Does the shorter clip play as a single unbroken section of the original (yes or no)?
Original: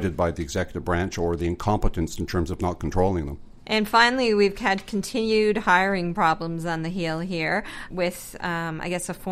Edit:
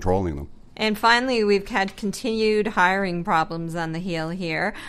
yes